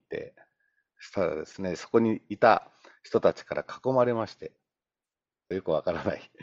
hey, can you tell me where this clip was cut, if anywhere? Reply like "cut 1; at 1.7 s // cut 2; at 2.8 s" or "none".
cut 1; at 5.5 s

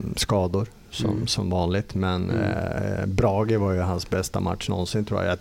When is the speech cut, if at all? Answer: none

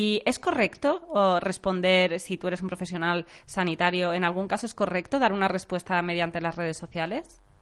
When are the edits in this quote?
none

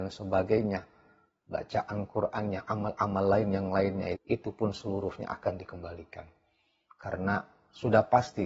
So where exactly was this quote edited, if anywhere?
cut 1; at 4.2 s

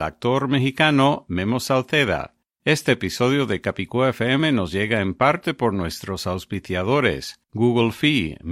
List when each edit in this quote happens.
none

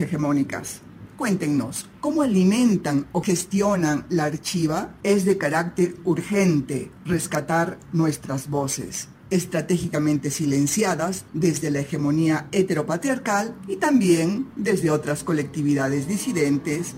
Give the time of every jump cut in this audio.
cut 1; at 5.0 s // cut 2; at 11.3 s

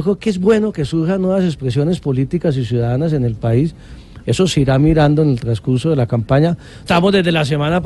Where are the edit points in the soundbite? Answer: cut 1; at 4.2 s // cut 2; at 6.9 s

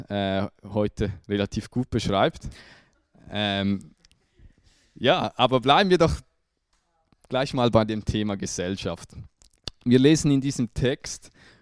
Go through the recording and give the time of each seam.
cut 1; at 2.5 s

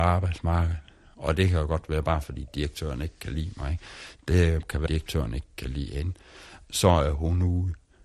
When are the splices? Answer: cut 1; at 4.9 s

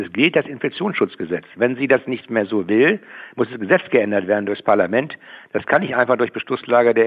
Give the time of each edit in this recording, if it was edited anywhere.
none

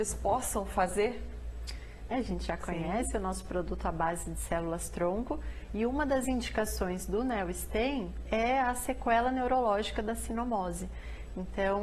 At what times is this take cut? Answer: cut 1; at 2.1 s // cut 2; at 8.3 s

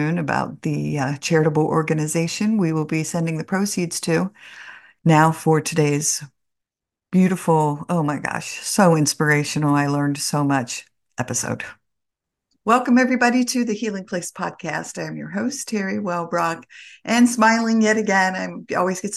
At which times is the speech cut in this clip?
cut 1; at 5.0 s

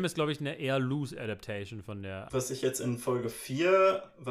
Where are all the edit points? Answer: cut 1; at 2.3 s

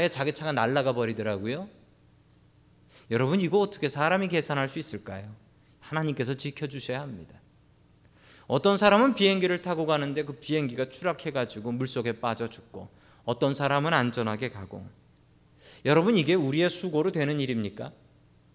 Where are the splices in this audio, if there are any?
none

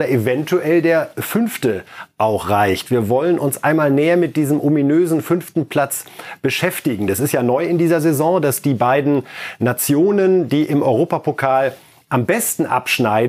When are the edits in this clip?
none

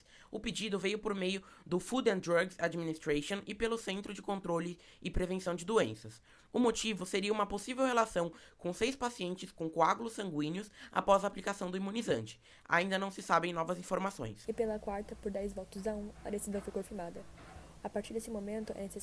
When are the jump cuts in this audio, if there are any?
cut 1; at 14.4 s // cut 2; at 17.8 s

